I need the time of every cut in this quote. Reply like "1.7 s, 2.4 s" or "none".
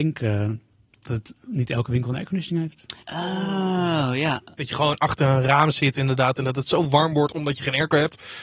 3.0 s

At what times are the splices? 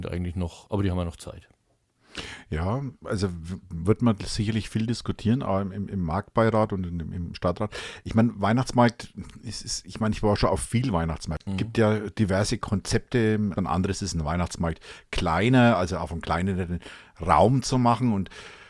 11.5 s, 13.5 s

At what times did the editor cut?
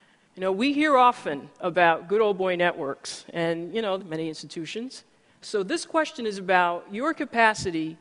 4.0 s, 5.3 s

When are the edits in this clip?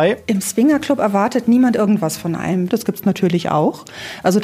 2.7 s

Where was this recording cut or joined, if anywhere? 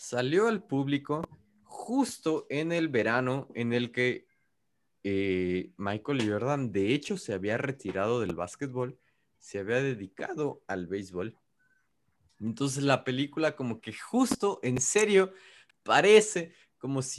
none

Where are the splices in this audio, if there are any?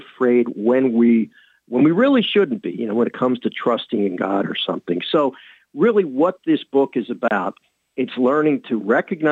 none

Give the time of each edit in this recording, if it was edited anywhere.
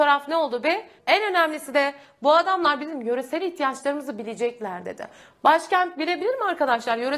1.0 s

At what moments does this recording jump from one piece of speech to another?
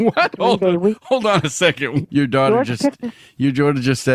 2.0 s

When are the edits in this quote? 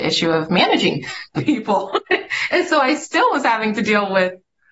none

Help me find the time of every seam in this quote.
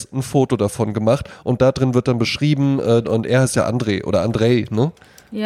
1.4 s, 3.0 s

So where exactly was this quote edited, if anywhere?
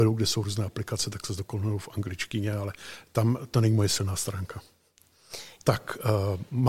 5.6 s

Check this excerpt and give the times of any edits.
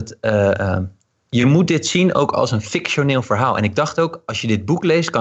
none

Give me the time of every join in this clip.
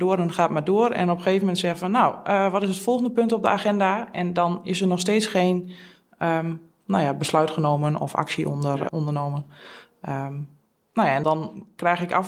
8.9 s, 11.2 s

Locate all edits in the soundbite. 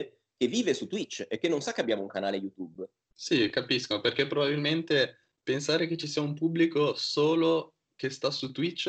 3.1 s

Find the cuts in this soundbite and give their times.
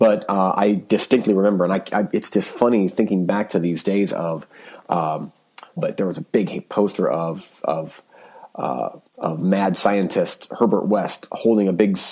5.8 s, 9.1 s

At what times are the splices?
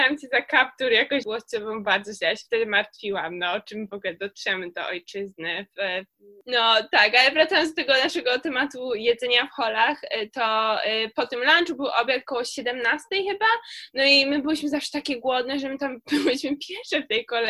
1.2 s

